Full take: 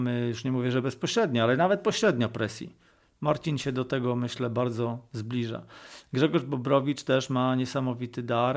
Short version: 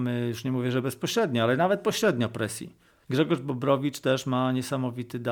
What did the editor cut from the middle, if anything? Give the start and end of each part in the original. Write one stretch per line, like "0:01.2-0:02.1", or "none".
0:03.0-0:06.1